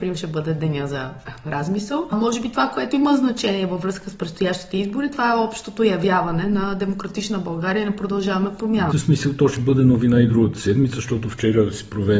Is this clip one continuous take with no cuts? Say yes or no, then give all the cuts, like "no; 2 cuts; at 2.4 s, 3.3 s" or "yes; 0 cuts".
no; 1 cut; at 8.9 s